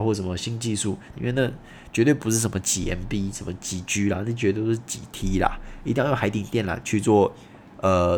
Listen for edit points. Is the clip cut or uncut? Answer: cut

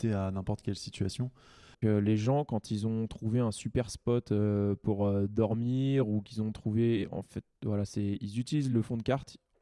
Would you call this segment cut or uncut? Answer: cut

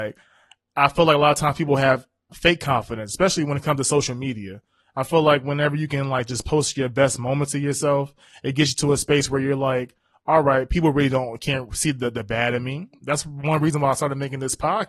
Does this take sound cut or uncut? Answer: uncut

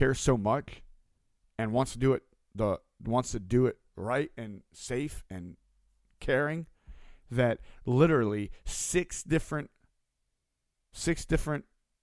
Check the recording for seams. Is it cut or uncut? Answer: uncut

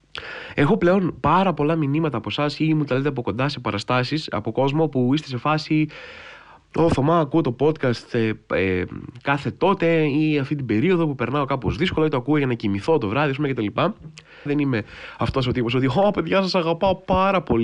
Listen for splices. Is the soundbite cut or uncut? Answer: cut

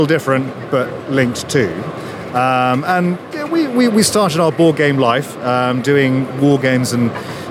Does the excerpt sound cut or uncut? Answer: uncut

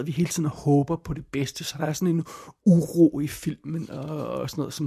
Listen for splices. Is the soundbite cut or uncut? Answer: uncut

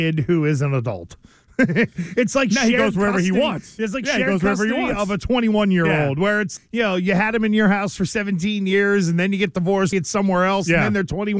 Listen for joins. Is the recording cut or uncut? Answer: cut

